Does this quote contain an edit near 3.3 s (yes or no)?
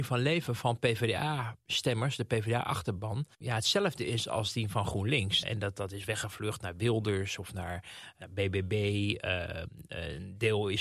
yes